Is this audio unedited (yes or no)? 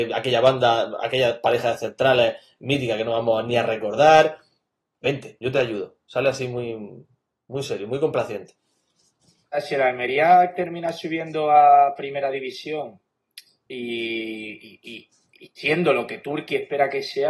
yes